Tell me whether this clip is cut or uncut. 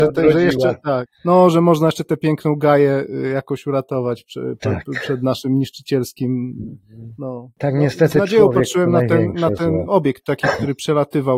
cut